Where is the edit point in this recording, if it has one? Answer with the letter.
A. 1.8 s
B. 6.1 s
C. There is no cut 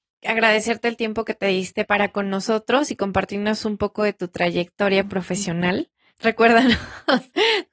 A